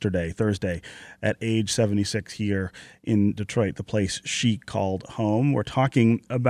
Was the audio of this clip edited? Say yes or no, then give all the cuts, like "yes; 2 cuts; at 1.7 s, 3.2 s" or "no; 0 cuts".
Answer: no; 0 cuts